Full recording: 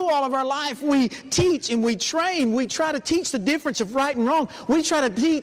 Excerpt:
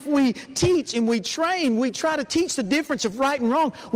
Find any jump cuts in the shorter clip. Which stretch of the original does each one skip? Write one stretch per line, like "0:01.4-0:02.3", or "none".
none